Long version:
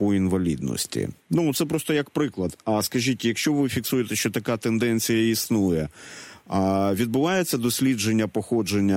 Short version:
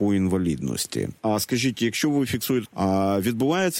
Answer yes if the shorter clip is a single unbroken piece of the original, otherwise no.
no